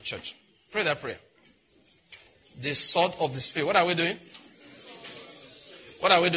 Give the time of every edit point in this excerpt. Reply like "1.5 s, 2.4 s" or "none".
2.4 s